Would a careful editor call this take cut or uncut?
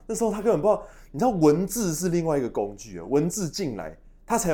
uncut